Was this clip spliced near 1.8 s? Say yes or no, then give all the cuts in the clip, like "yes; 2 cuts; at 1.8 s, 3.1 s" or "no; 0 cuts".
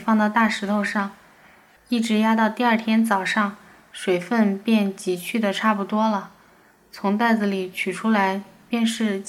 yes; 1 cut; at 1.8 s